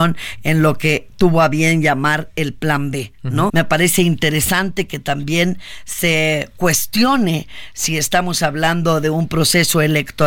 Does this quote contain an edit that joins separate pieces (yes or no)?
yes